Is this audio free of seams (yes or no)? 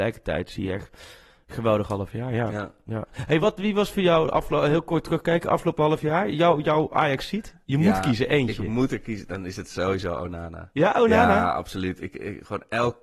yes